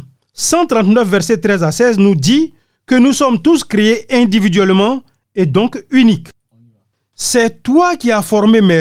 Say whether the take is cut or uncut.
uncut